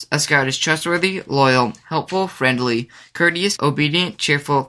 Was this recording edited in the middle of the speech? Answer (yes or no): yes